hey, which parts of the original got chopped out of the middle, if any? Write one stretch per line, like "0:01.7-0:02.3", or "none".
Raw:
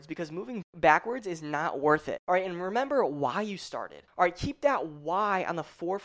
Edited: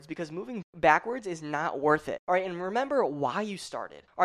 none